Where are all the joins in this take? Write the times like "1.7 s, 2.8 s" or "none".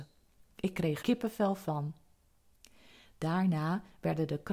1.0 s